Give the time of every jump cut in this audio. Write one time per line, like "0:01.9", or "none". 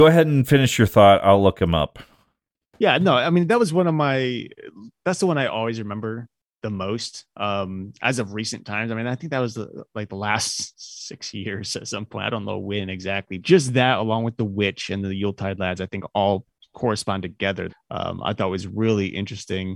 0:13.4
0:17.7